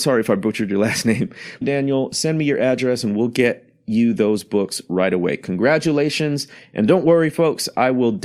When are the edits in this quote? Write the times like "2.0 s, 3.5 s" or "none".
1.6 s